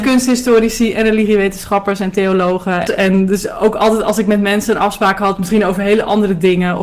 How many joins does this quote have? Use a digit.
1